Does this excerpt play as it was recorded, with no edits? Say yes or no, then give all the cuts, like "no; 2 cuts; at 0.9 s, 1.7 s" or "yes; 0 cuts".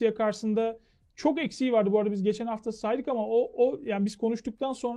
yes; 0 cuts